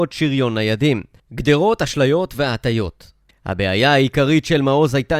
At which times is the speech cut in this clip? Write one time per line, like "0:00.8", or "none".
0:01.2
0:03.3